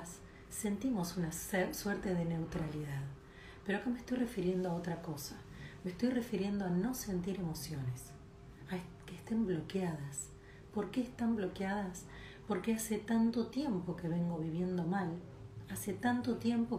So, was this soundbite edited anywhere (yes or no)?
no